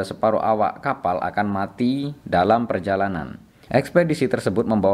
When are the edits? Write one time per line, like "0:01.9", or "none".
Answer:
0:03.7